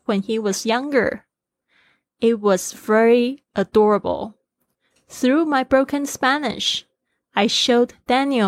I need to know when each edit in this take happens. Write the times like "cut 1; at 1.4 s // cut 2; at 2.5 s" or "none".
none